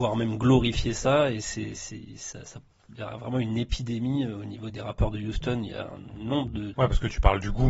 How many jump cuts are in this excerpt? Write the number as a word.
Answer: two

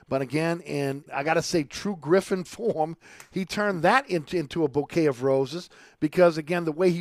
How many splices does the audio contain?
one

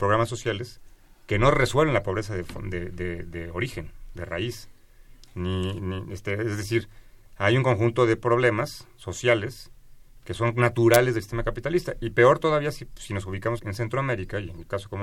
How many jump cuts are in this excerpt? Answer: two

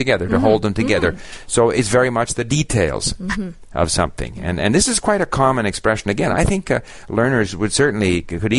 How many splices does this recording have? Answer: zero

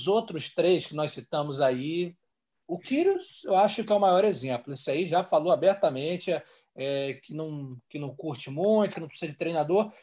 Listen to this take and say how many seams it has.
one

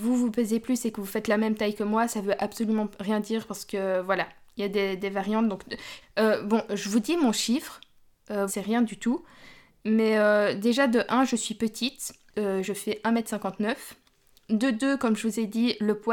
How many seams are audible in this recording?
two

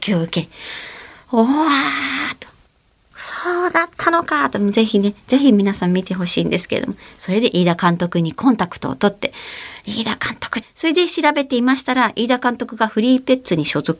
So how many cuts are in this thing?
one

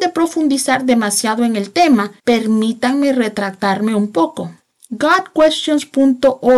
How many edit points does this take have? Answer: one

